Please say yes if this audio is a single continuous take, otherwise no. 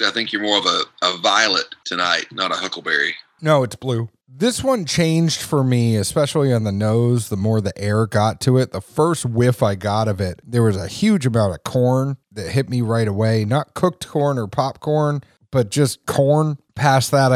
yes